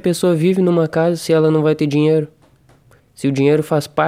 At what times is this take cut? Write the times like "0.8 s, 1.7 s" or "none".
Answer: 3.0 s